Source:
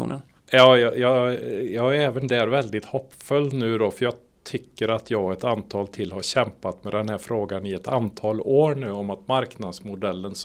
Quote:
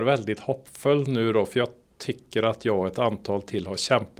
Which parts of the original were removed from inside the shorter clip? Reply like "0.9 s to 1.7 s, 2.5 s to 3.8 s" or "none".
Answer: none